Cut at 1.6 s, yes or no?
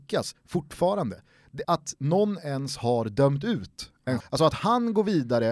yes